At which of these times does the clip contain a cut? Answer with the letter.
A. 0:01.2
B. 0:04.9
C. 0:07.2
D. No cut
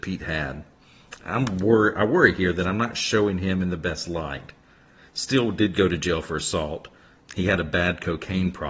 C